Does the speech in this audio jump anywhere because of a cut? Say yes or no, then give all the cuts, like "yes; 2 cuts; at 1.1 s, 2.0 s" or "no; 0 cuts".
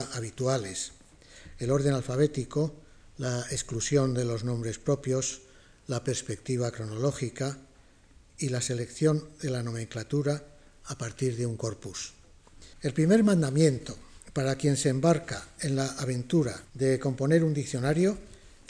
yes; 2 cuts; at 12.7 s, 16.6 s